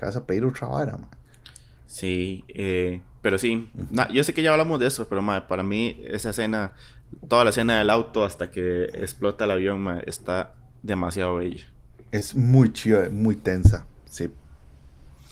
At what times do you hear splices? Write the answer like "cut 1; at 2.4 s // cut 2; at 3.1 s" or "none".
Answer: cut 1; at 12.1 s